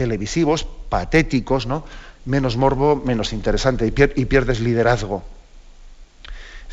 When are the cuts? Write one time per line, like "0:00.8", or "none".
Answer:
0:02.1